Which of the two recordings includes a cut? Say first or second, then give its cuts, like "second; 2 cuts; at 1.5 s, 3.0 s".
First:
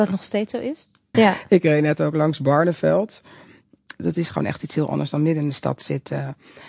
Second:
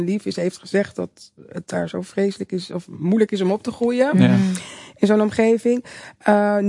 first; 2 cuts; at 1.1 s, 3.9 s